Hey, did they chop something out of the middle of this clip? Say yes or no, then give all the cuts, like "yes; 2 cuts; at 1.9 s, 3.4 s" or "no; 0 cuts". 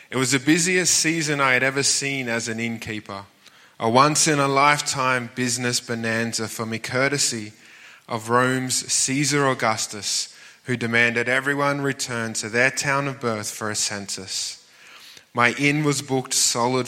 no; 0 cuts